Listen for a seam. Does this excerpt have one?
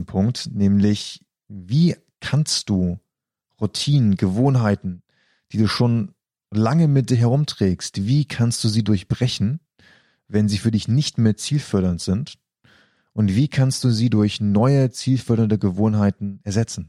no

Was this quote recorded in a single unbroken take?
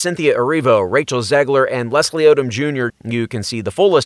no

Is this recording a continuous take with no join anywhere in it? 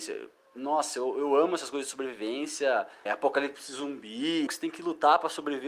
no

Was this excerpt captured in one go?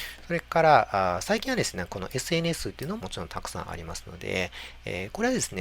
no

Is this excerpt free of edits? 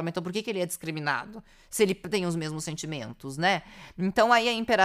yes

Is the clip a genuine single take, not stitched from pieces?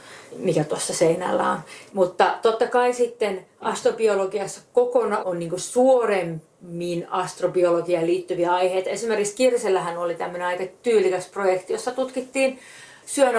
no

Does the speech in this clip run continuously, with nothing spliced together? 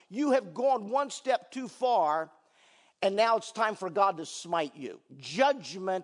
yes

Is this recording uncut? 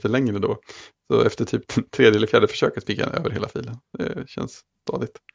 yes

